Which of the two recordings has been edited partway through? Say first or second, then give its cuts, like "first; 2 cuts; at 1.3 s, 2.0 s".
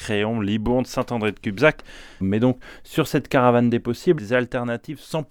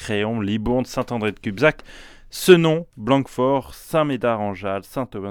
first; 2 cuts; at 2.2 s, 4.2 s